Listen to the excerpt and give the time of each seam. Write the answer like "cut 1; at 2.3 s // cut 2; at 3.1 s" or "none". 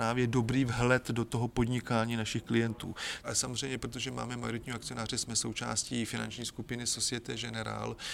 cut 1; at 3.2 s

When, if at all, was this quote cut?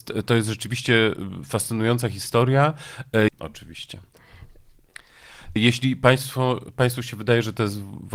cut 1; at 3.3 s // cut 2; at 5.6 s

